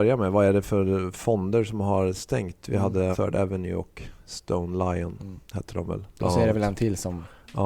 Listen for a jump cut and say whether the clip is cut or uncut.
cut